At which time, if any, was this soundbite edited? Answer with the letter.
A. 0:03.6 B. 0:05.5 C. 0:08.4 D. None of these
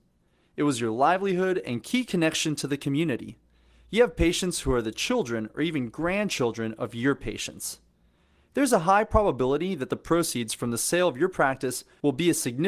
D